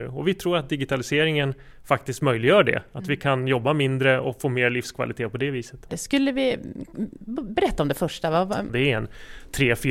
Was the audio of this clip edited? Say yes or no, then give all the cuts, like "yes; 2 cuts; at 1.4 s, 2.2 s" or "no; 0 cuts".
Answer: yes; 2 cuts; at 5.9 s, 8.7 s